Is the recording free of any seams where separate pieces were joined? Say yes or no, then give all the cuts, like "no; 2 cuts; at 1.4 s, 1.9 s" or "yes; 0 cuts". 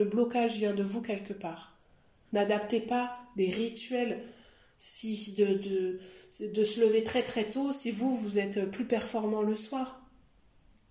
no; 1 cut; at 2.2 s